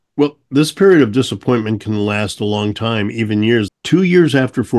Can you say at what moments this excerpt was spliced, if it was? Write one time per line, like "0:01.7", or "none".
0:03.7